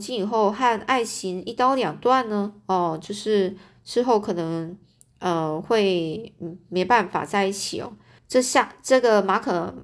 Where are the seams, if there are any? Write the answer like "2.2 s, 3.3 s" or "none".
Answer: 8.2 s